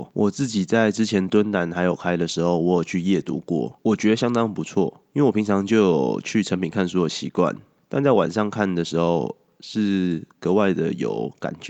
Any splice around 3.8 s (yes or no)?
no